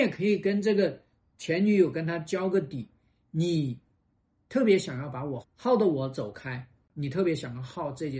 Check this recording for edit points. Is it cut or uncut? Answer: cut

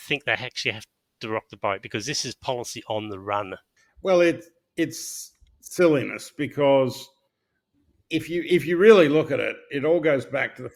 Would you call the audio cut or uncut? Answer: uncut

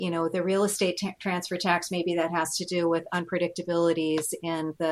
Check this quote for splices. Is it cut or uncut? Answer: uncut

